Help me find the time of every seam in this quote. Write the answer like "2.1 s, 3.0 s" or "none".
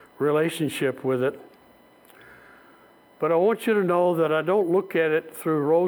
none